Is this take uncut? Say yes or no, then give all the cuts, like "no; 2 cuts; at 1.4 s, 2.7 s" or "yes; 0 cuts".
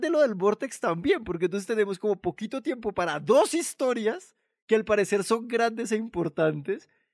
yes; 0 cuts